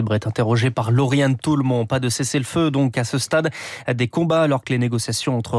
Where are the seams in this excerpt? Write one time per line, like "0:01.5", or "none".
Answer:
none

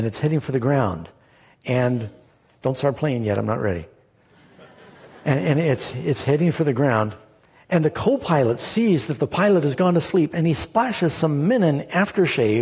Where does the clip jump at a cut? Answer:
none

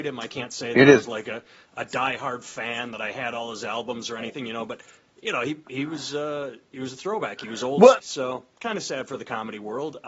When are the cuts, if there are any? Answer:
0:08.0

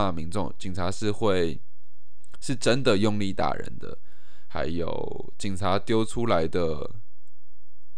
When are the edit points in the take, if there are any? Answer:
none

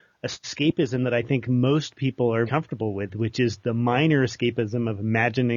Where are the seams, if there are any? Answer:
0:02.5

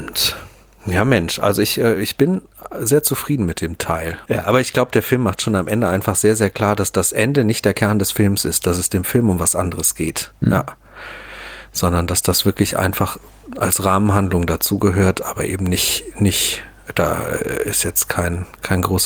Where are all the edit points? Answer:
0:04.3

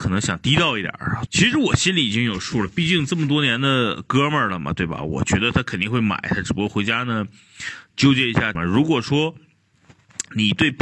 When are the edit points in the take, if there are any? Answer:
0:01.3
0:08.5

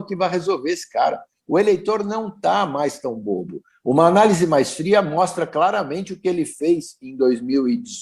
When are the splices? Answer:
none

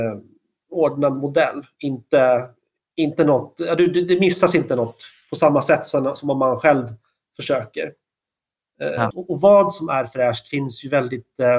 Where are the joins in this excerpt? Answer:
0:09.1

